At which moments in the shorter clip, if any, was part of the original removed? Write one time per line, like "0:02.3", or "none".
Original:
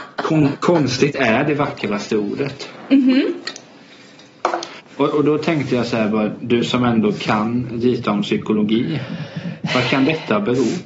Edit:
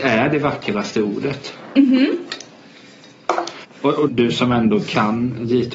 0:04.1